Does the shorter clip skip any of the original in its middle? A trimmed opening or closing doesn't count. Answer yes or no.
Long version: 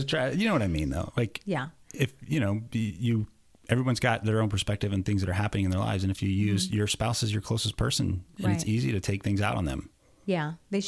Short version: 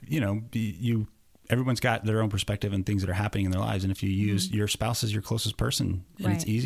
no